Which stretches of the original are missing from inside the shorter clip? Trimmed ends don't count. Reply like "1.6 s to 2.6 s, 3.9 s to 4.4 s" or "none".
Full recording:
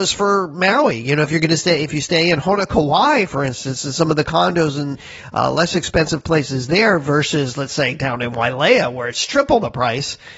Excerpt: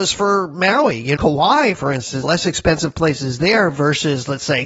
1.2 s to 2.7 s, 3.8 s to 5.5 s